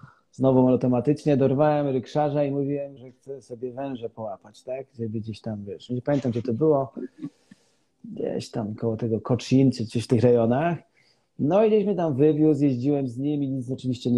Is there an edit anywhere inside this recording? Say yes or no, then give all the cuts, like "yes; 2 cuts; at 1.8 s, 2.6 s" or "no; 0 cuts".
yes; 1 cut; at 3.0 s